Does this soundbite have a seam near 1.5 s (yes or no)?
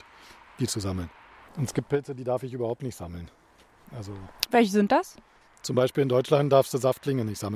yes